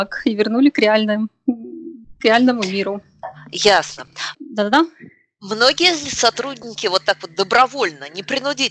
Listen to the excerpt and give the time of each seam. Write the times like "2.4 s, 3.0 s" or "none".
4.3 s